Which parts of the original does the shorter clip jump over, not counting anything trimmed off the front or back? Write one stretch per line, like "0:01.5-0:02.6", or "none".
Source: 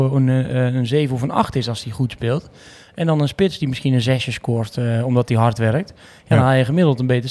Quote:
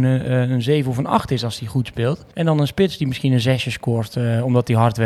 0:02.6-0:02.9